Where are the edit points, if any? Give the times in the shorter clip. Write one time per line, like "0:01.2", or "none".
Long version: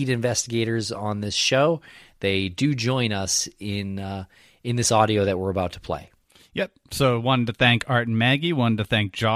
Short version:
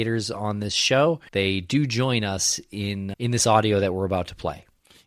0:01.3
0:03.1